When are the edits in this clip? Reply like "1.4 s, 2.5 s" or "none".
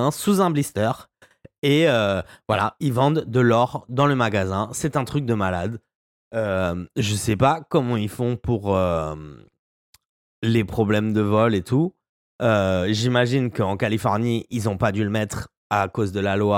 none